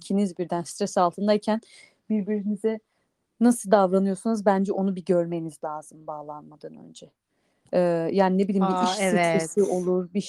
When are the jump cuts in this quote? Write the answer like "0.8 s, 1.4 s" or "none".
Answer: none